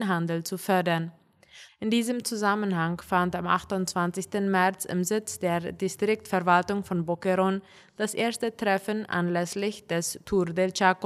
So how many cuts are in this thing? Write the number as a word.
one